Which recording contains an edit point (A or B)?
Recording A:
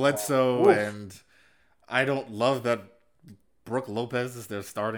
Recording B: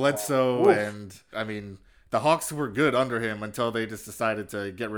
B